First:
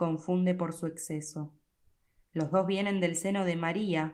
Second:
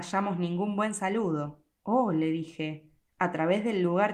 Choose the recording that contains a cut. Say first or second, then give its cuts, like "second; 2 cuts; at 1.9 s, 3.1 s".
second; 1 cut; at 1.8 s